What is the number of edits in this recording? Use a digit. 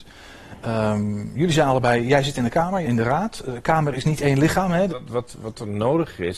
2